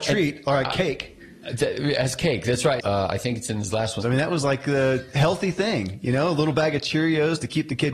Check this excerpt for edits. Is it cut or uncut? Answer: cut